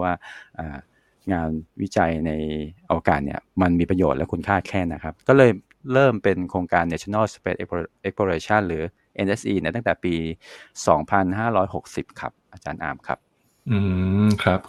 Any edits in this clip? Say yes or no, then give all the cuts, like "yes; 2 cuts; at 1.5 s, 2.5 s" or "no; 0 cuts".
yes; 1 cut; at 5.0 s